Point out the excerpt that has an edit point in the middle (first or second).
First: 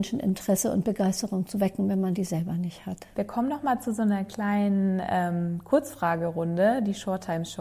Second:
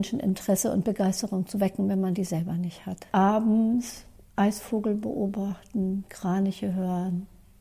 second